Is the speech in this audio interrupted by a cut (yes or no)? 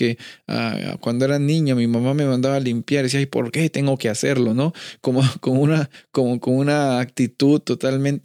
no